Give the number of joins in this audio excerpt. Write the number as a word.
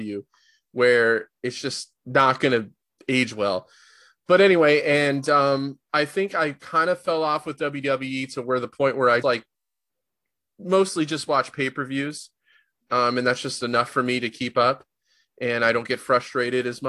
one